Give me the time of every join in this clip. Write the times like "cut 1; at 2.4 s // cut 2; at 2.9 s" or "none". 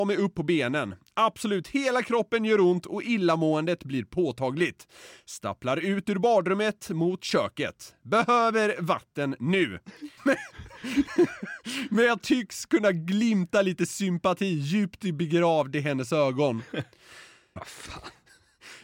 cut 1; at 10.2 s // cut 2; at 17.6 s